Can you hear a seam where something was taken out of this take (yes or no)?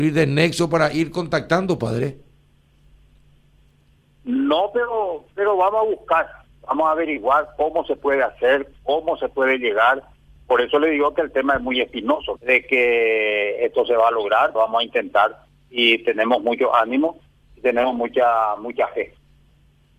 yes